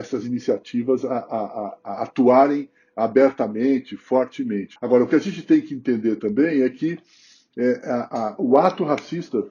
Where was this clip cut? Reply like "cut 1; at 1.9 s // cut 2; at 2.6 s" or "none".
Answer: cut 1; at 4.8 s